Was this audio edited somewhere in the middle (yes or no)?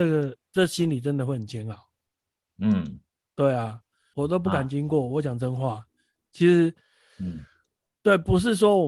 yes